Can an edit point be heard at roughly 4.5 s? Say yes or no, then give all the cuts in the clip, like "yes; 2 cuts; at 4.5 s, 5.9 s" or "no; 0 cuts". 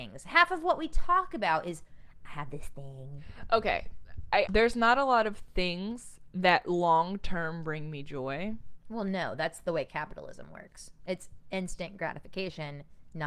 yes; 1 cut; at 4.5 s